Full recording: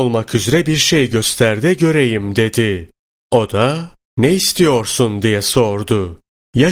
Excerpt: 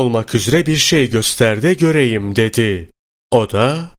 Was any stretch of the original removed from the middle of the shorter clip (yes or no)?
no